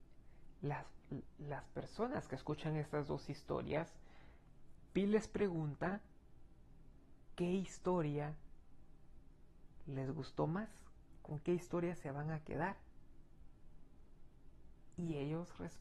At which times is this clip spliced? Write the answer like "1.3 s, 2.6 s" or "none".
none